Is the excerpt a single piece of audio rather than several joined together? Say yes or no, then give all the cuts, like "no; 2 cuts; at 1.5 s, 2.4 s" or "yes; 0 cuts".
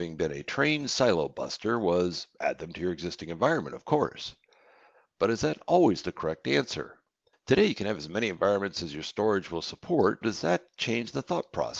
no; 2 cuts; at 7.3 s, 10.2 s